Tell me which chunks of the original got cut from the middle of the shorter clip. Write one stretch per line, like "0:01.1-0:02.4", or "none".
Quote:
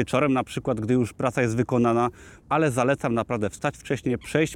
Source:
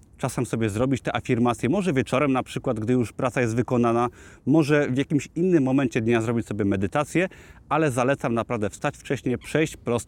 0:04.4-0:07.6

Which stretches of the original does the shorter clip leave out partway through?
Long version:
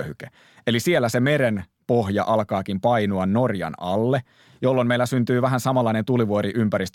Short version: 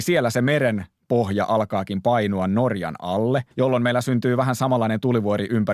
0:04.3-0:04.6

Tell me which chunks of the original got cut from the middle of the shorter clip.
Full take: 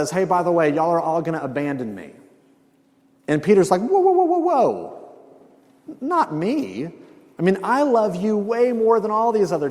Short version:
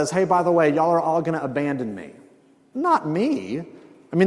0:02.7-0:06.0

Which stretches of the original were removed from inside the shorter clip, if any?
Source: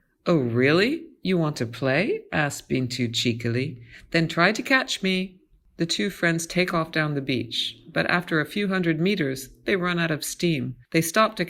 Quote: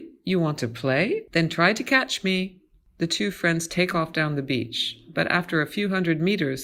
0:02.3-0:04.1

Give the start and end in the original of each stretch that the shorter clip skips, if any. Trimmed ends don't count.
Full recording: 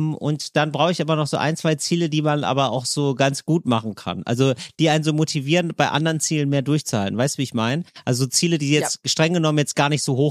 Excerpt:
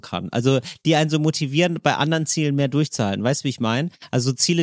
none

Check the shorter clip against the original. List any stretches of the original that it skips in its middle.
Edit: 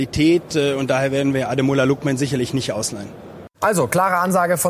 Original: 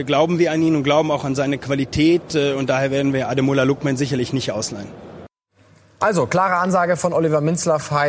0:05.3-0:05.9

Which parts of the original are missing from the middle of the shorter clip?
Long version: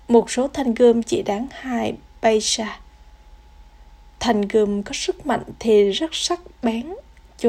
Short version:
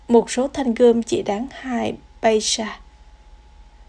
none

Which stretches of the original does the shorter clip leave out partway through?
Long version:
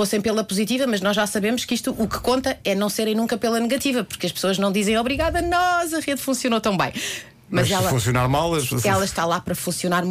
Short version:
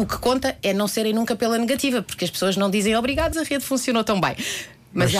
0:05.3-0:05.9

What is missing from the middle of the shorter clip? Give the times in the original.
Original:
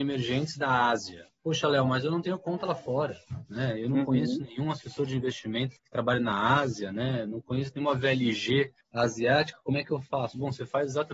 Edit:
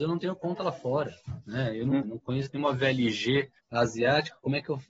0:04.1-0:07.2

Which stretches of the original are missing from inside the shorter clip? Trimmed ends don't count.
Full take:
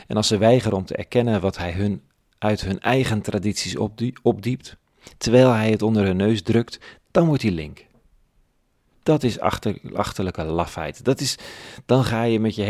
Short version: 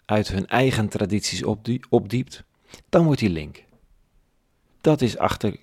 0:05.1-0:07.0

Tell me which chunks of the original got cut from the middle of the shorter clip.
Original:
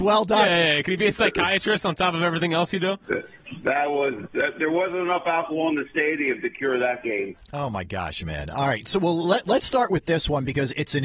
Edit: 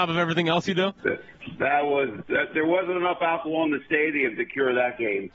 none

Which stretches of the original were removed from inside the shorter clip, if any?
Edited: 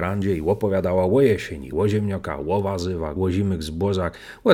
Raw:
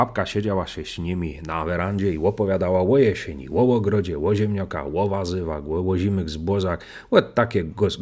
0:03.5-0:04.2
0:05.6-0:05.8

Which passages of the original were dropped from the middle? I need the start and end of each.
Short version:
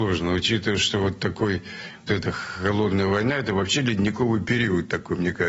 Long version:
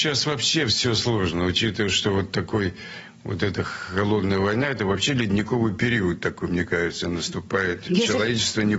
0:03.2-0:03.4

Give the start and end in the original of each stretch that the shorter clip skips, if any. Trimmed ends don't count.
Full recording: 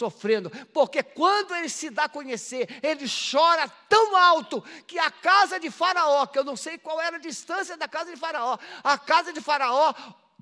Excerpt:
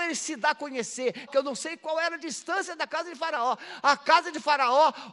0:02.8-0:06.3

